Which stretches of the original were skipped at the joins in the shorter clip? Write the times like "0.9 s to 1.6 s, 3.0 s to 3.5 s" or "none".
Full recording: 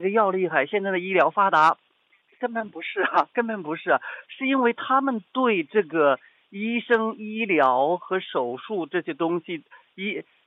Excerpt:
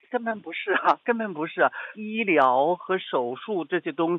4.2 s to 7.2 s

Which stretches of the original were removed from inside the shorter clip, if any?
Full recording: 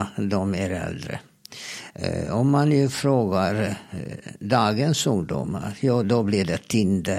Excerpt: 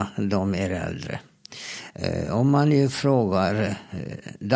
none

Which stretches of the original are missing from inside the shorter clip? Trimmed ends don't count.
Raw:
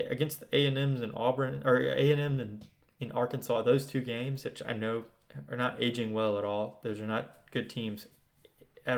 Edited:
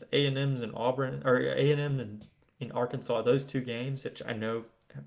none

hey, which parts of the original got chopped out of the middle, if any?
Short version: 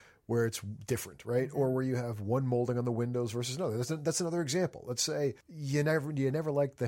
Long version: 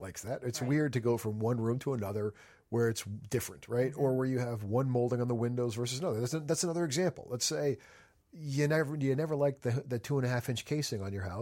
7.8 s to 8.2 s

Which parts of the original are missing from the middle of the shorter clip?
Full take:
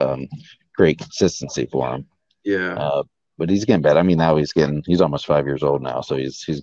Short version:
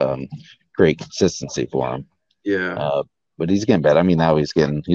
none

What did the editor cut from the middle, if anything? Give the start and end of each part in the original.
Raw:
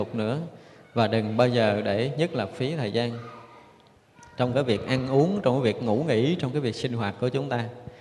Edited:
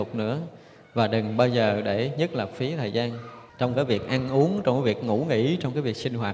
3.5 s to 4.3 s

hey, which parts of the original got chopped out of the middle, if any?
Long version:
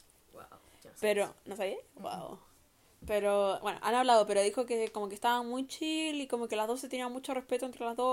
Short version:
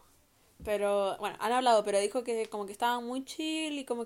none

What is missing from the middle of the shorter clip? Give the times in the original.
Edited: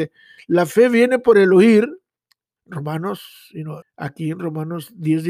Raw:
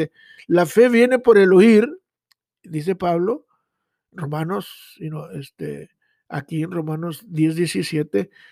2.6 s to 4.0 s, 5.3 s to 6.1 s

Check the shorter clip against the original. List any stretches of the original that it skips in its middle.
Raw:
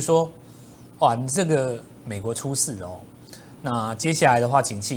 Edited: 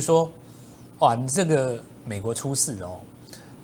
none

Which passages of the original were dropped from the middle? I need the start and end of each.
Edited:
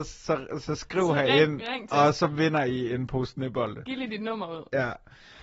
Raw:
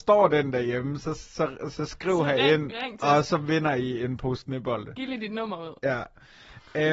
none

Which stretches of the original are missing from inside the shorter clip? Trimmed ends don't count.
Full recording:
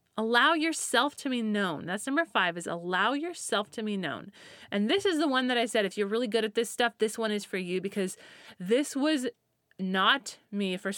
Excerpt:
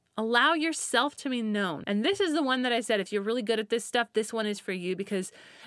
1.8 s to 4.7 s

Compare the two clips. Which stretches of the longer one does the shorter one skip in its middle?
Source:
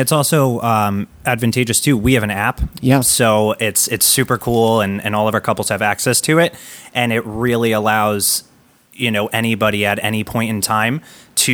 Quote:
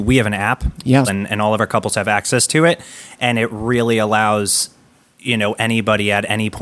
3.0 s to 4.8 s

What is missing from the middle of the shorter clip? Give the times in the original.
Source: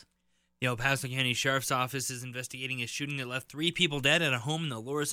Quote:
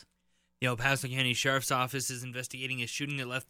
none

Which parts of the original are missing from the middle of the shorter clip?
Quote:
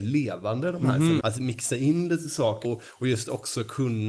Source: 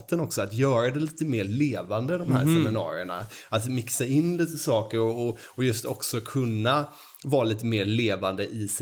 2.7 s to 3.5 s, 4.9 s to 5.2 s

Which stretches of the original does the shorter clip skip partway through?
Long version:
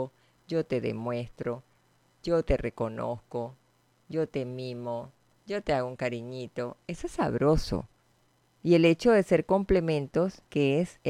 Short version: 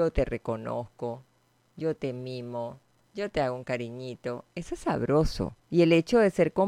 8.0 s to 8.6 s

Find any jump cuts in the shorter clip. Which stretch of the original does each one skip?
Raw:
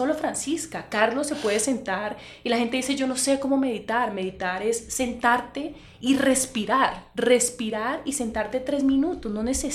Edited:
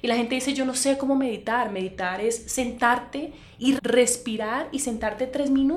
6.2 s to 7.1 s

